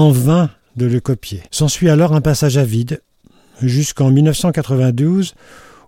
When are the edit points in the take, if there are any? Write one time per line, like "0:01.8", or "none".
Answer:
0:01.5